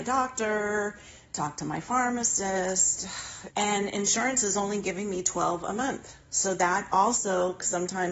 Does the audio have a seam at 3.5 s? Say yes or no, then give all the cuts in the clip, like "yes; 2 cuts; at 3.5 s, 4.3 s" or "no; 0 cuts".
yes; 1 cut; at 3.5 s